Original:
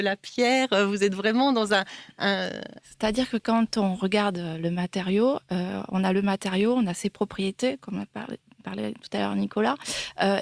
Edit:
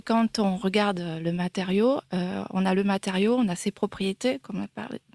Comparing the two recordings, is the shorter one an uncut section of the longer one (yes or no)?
yes